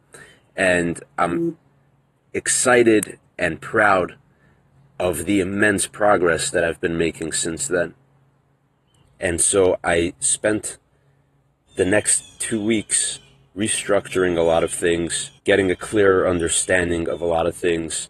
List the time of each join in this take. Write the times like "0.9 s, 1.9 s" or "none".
9.0 s, 15.4 s